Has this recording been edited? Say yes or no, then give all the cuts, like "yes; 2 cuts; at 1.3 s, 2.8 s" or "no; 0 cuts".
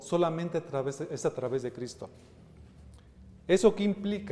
no; 0 cuts